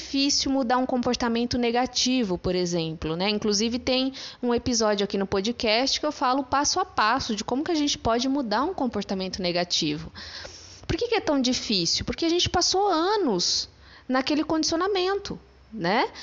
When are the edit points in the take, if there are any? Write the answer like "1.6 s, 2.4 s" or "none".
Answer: none